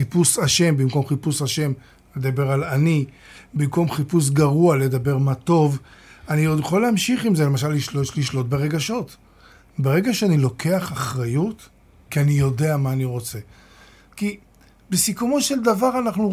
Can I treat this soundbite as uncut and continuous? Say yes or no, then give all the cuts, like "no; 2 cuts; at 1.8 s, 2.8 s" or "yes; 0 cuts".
no; 2 cuts; at 12.1 s, 14.1 s